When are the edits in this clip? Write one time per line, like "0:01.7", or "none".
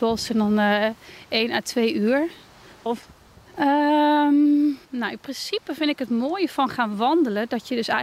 0:02.9
0:04.8